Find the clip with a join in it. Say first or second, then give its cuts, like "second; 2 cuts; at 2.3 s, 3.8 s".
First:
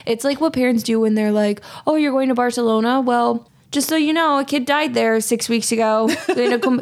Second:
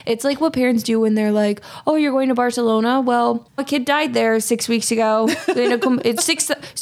second; 1 cut; at 3.6 s